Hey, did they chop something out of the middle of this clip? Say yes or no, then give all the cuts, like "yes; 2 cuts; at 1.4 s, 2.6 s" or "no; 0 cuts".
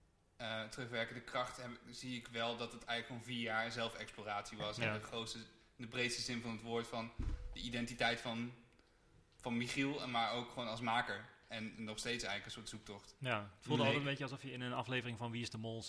no; 0 cuts